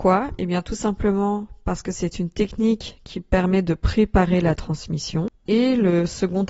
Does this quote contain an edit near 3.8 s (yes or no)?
no